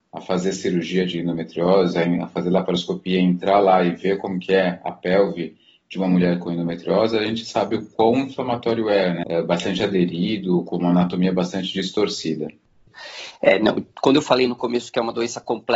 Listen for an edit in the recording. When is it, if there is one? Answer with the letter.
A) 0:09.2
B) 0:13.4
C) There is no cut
A